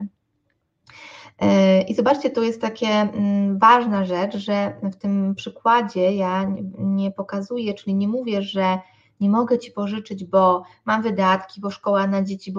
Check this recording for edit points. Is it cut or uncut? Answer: uncut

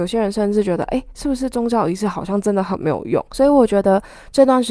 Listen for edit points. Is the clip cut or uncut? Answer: cut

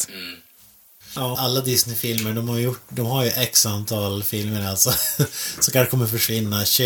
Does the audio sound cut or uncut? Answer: cut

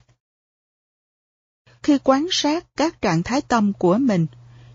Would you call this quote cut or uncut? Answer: cut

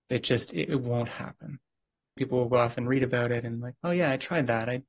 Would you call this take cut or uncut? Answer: cut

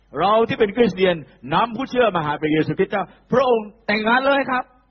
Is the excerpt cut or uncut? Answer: uncut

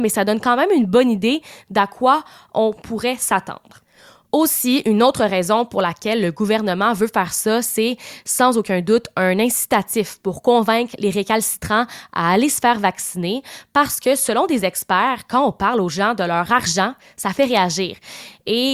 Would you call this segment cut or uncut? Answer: uncut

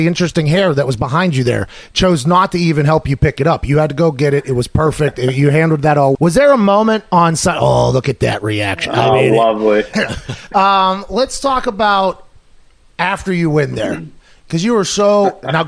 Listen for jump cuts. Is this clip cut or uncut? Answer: cut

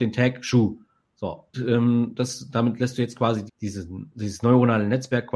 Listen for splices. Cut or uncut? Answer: cut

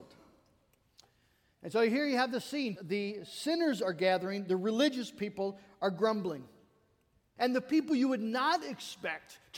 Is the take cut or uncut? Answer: cut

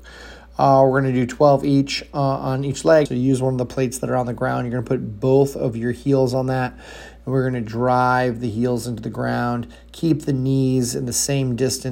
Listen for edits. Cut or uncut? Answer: cut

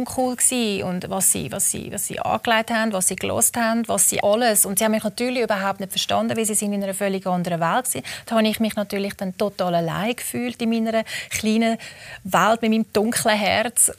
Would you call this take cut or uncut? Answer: cut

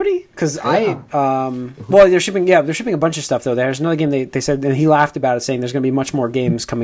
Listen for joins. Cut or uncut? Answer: cut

